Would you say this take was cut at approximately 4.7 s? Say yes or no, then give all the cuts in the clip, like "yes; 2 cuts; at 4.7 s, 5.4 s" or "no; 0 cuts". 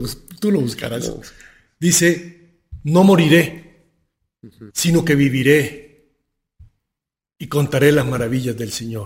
yes; 1 cut; at 4.7 s